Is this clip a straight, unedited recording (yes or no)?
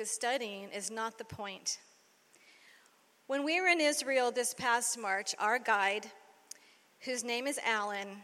yes